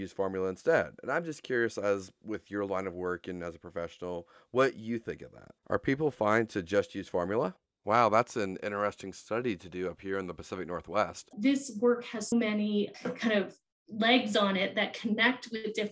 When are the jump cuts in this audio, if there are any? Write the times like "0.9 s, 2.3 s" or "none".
7.8 s, 11.3 s, 12.3 s